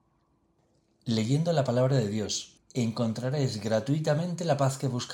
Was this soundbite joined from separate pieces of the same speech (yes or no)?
yes